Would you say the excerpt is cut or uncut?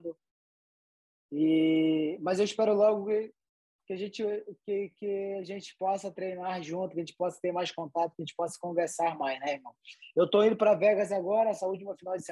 uncut